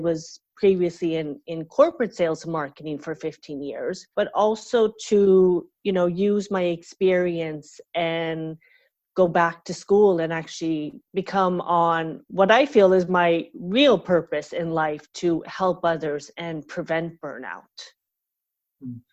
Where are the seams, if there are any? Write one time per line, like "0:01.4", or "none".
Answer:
0:04.1
0:11.0